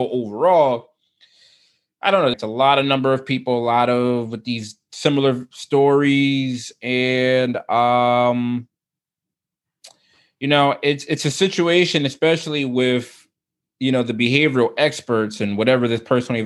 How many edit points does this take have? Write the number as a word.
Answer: one